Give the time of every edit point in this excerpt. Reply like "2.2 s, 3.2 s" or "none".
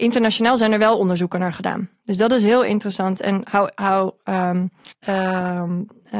3.2 s, 4.9 s